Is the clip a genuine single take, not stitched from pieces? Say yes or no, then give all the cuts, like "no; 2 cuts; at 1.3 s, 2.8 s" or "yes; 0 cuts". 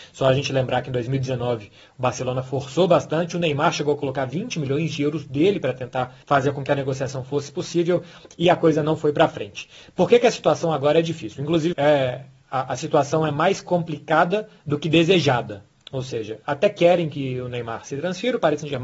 no; 1 cut; at 11.7 s